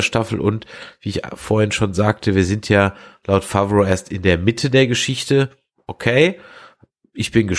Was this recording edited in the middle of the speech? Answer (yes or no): no